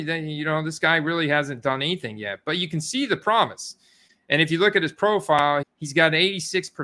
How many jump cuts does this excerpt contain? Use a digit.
1